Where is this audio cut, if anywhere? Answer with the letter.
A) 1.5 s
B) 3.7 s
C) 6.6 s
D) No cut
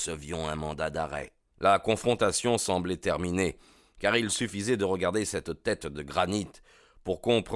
A